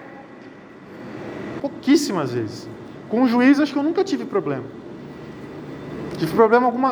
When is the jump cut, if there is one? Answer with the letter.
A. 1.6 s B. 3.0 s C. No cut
A